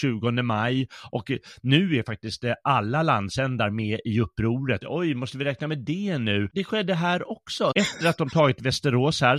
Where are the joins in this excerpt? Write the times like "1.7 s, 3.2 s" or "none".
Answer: 4.8 s, 6.5 s, 7.7 s